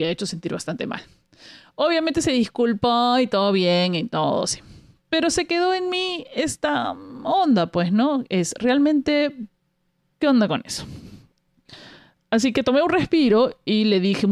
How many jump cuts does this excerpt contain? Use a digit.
1